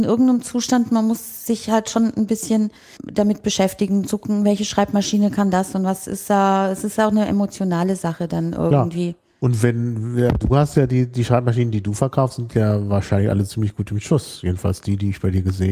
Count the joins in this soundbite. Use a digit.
1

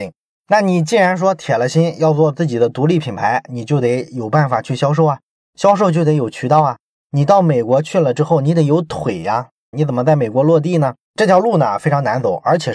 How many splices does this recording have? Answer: 2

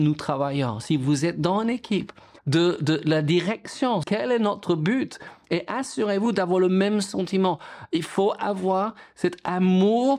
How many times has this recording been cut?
2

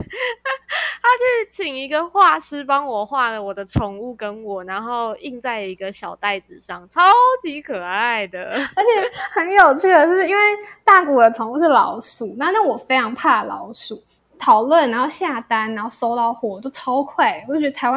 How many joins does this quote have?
1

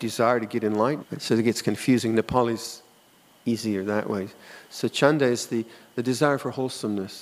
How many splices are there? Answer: 1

